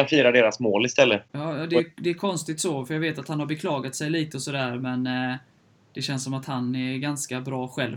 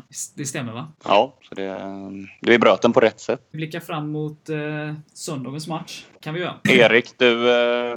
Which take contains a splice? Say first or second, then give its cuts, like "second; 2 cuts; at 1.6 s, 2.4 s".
second; 2 cuts; at 3.5 s, 6.2 s